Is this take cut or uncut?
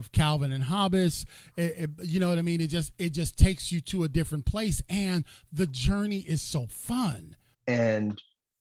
cut